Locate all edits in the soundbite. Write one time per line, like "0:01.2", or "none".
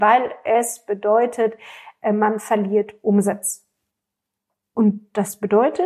0:04.6